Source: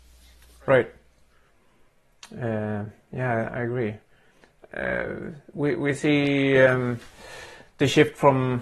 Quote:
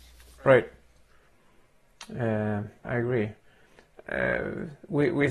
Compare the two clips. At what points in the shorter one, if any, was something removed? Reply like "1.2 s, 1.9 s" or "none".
2.8 s